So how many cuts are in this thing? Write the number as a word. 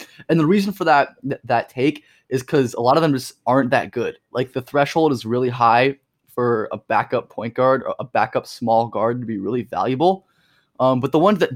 zero